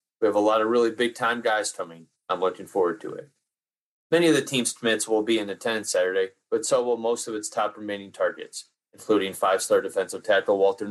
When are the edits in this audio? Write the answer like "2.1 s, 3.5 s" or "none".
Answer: none

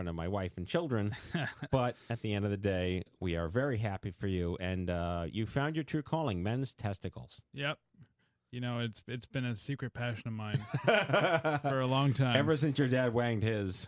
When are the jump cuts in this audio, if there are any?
none

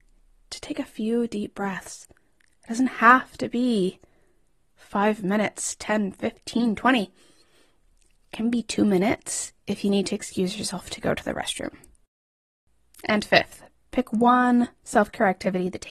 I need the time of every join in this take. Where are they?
none

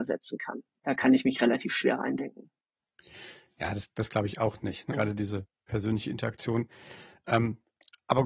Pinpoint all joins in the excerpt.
4.9 s

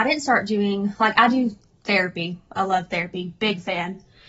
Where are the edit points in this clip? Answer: none

